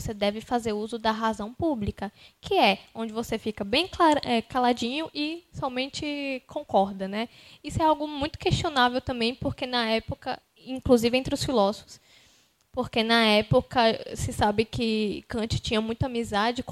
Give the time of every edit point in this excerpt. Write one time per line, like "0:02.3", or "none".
none